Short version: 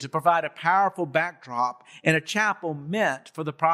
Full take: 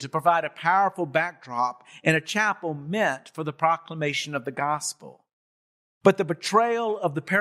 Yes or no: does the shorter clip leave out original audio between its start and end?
no